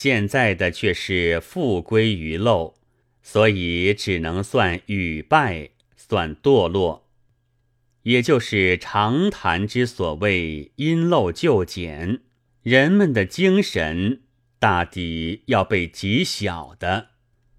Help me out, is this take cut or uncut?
cut